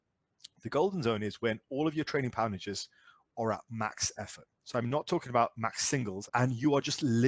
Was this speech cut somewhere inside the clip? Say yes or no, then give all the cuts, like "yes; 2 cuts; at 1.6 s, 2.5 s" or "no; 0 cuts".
yes; 2 cuts; at 4.6 s, 6.3 s